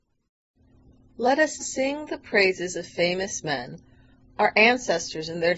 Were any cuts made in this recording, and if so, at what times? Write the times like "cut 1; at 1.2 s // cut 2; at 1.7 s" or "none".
cut 1; at 1.6 s